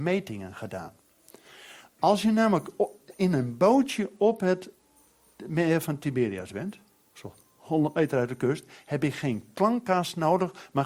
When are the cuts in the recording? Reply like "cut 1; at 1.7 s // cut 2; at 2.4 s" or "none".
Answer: none